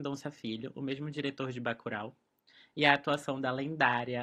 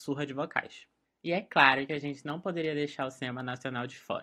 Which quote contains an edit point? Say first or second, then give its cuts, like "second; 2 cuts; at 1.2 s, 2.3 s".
second; 1 cut; at 1.0 s